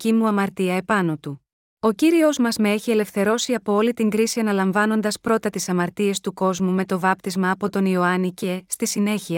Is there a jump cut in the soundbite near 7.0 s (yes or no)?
no